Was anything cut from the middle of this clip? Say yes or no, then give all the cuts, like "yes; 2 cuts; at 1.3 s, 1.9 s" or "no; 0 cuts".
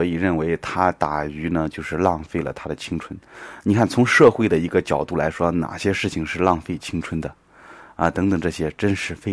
no; 0 cuts